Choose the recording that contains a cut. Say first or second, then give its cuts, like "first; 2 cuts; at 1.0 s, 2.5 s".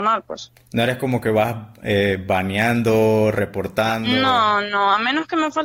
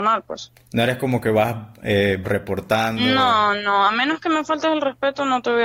second; 1 cut; at 2.2 s